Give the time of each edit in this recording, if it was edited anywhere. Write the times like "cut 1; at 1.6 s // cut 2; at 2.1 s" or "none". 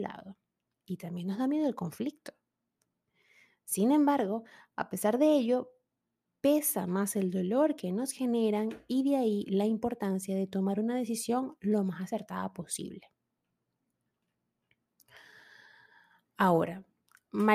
none